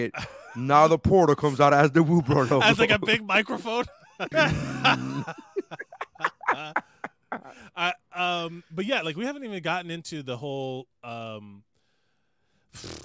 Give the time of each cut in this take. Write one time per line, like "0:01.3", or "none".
0:04.3